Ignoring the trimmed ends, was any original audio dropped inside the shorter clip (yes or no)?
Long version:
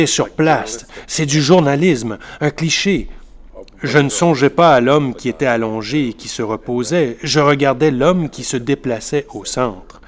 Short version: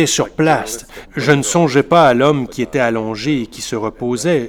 yes